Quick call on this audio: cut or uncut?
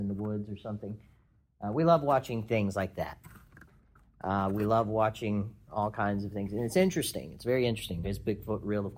cut